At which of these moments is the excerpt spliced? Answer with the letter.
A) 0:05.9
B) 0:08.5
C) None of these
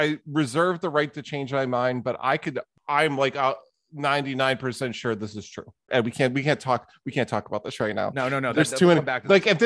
A